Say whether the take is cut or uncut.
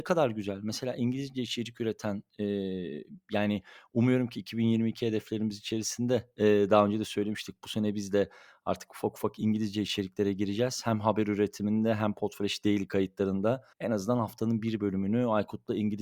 cut